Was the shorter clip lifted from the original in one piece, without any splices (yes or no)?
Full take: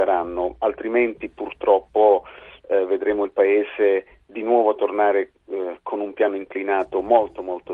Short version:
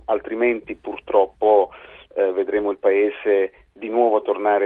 yes